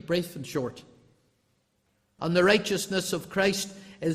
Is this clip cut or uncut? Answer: cut